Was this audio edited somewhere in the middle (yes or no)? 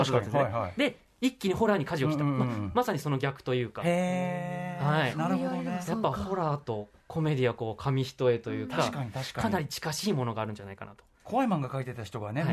no